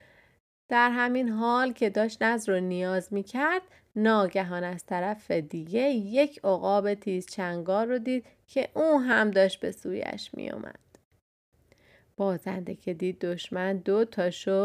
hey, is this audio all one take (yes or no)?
yes